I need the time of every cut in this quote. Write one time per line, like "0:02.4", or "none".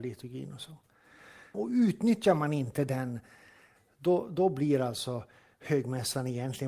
0:01.5